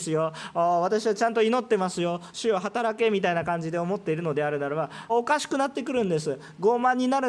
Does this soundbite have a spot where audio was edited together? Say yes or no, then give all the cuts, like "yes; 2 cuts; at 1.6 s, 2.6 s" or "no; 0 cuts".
yes; 1 cut; at 5.1 s